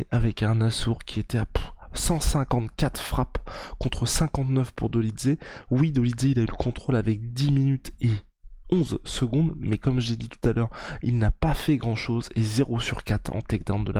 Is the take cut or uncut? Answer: uncut